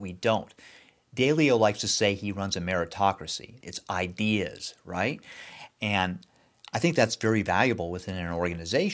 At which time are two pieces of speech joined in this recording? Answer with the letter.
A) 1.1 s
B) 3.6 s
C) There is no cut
B